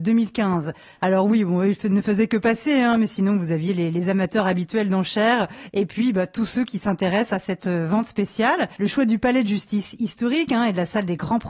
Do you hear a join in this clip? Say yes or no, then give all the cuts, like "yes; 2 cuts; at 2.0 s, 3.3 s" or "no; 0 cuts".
yes; 2 cuts; at 1.0 s, 8.8 s